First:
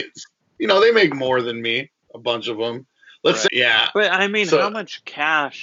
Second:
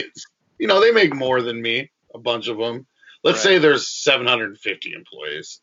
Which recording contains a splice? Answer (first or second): first